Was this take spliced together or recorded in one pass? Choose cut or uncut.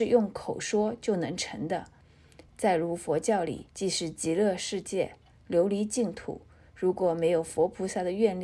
cut